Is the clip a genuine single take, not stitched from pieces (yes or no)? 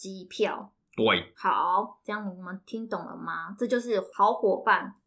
yes